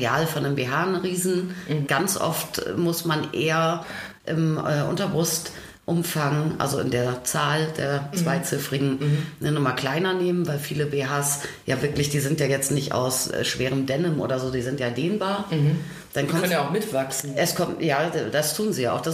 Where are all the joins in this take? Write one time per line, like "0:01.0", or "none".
0:01.9